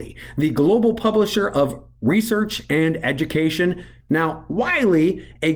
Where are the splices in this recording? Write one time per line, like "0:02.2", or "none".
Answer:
0:04.0